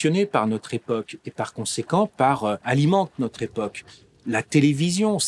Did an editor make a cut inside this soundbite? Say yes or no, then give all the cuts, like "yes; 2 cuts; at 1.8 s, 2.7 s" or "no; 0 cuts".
yes; 1 cut; at 2.6 s